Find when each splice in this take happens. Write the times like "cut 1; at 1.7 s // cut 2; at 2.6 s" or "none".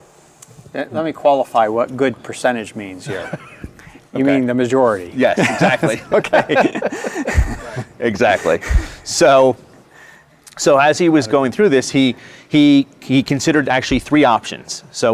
none